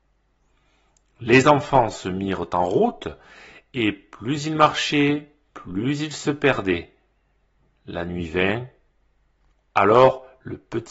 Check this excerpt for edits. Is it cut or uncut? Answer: uncut